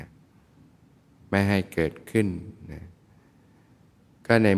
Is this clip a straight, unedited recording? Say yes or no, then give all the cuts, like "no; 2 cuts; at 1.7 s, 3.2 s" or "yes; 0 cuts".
yes; 0 cuts